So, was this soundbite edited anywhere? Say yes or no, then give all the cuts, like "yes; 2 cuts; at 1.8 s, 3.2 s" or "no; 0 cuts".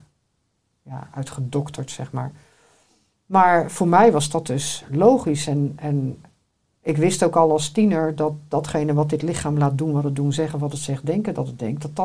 no; 0 cuts